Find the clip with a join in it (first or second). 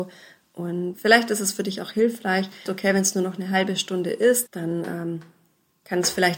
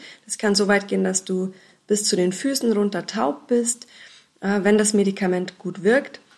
first